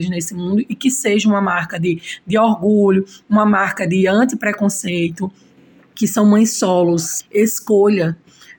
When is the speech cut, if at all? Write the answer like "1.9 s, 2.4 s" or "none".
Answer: 5.9 s, 7.2 s